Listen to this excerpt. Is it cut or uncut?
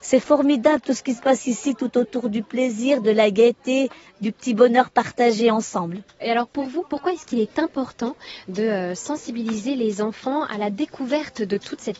uncut